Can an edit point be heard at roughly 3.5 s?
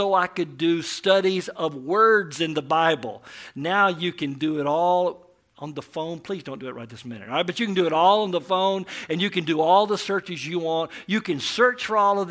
no; 0 cuts

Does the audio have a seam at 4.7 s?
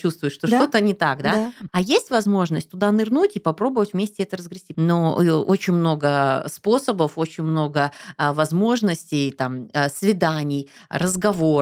yes; 2 cuts; at 1.7 s, 4.7 s

